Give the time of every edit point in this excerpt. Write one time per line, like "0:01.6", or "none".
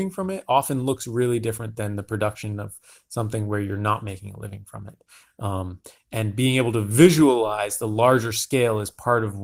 none